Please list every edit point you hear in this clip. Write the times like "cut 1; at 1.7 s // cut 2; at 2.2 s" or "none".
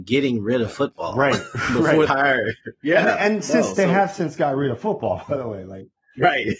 cut 1; at 2.1 s